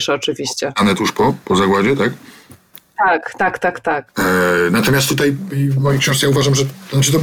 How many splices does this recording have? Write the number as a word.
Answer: zero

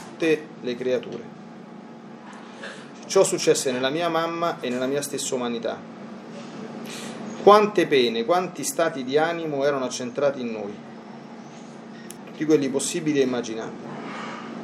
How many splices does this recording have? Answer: one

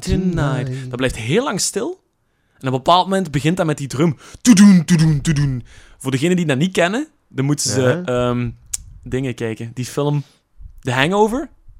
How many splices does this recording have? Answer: one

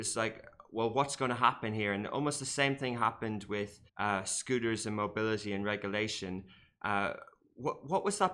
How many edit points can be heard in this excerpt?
one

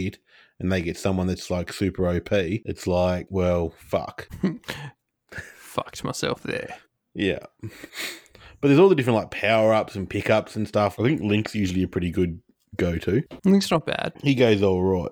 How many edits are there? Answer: one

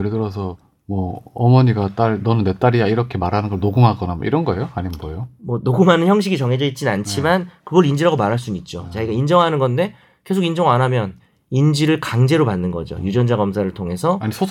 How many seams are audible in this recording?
zero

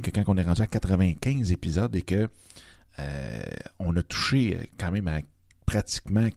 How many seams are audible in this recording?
zero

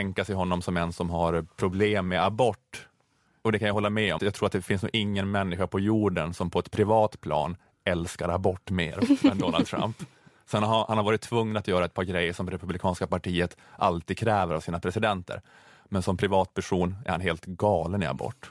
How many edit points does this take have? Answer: one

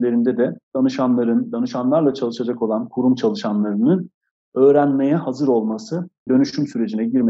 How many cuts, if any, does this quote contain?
one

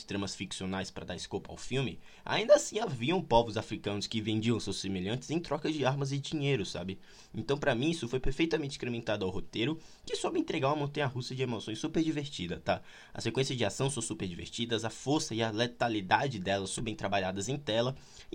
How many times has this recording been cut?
one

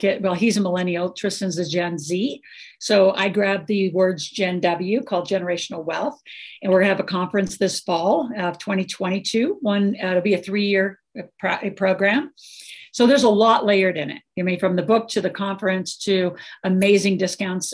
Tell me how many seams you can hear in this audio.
zero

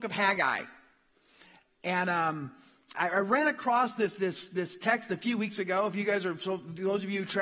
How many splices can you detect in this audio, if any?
one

